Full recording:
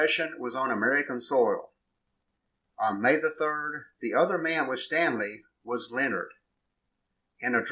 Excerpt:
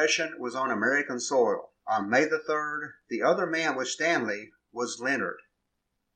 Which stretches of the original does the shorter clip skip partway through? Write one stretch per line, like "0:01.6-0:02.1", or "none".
0:01.8-0:02.7